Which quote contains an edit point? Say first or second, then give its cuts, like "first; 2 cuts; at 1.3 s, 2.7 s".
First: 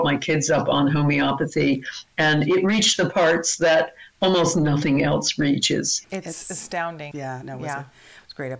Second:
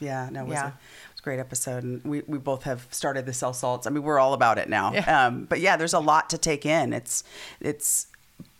first; 2 cuts; at 6.0 s, 7.1 s